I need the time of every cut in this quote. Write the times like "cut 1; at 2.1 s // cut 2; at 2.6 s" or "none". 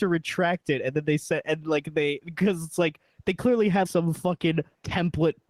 cut 1; at 1.6 s // cut 2; at 3.9 s